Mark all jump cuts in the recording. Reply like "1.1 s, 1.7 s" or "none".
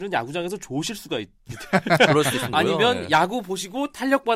2.5 s